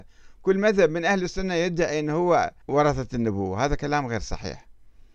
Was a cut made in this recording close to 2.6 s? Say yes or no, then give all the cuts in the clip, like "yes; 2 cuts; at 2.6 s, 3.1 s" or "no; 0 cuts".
yes; 1 cut; at 2.6 s